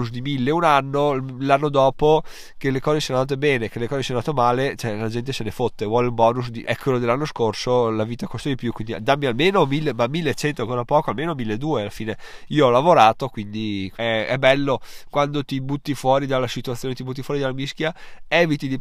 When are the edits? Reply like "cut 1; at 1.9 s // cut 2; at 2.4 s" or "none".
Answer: cut 1; at 6.6 s // cut 2; at 13.9 s